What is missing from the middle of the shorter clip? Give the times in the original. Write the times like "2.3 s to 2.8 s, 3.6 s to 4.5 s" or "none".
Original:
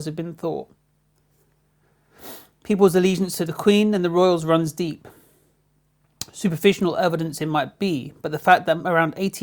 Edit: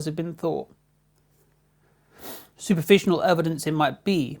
2.6 s to 6.3 s